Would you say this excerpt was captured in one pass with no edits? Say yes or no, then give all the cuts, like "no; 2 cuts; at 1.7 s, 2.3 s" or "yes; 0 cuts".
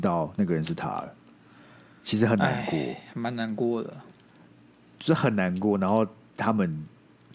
yes; 0 cuts